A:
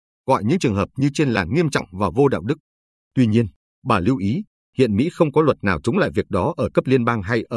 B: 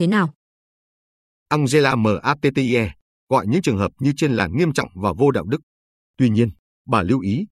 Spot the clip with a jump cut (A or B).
B